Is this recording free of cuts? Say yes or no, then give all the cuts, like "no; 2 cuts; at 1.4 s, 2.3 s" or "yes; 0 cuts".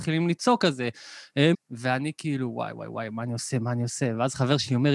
no; 1 cut; at 1.5 s